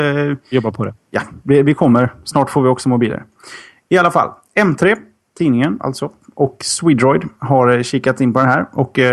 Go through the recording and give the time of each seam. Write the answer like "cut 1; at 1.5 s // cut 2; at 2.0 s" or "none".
none